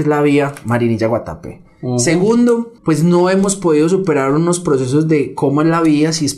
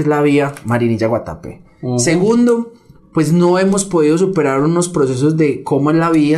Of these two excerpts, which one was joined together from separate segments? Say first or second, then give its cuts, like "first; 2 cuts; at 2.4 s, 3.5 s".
first; 1 cut; at 2.8 s